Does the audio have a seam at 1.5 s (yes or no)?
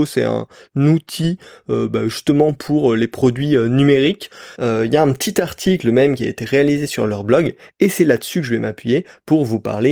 no